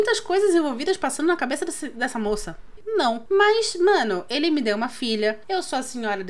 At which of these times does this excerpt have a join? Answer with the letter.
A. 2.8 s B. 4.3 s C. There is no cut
A